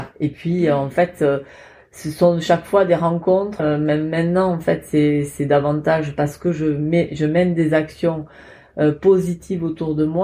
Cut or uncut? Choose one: cut